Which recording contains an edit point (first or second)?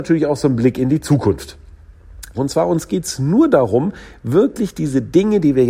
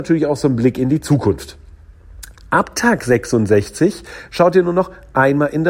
first